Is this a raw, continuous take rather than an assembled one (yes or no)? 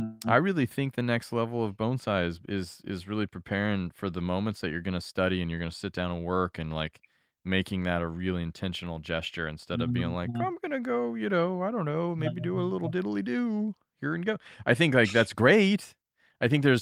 yes